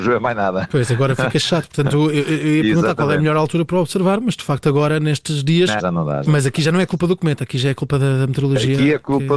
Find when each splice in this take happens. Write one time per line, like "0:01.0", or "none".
0:05.8